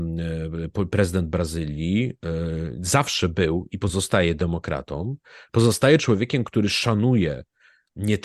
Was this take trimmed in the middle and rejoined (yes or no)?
no